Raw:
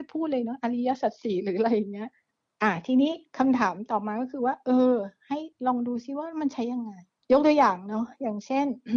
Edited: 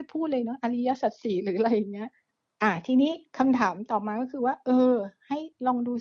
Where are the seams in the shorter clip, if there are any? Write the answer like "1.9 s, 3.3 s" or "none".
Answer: none